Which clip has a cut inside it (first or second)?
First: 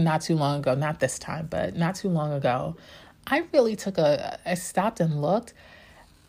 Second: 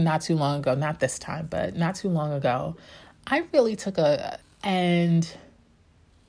second